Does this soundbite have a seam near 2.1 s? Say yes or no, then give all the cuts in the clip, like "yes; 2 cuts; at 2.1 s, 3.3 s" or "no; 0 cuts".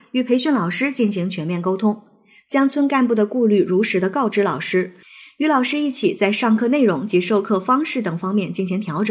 no; 0 cuts